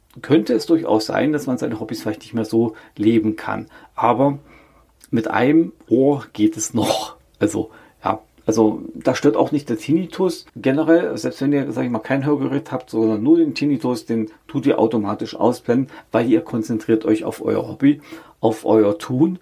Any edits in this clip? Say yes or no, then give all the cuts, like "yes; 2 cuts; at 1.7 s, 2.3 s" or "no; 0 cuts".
yes; 1 cut; at 10.5 s